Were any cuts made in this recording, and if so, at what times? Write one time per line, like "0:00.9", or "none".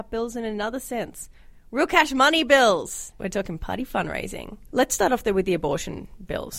0:03.1
0:04.7